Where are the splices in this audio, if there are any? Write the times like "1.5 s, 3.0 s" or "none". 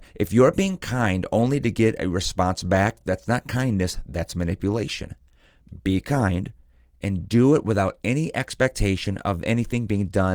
none